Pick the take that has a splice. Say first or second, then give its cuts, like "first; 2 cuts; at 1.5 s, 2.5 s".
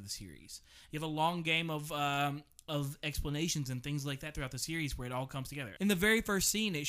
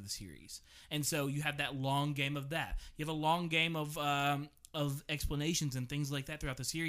first; 2 cuts; at 0.9 s, 5.8 s